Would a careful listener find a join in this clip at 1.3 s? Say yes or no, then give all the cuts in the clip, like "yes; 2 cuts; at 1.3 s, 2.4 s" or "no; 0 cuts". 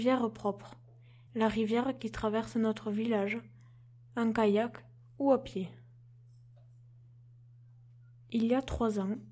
yes; 1 cut; at 1.3 s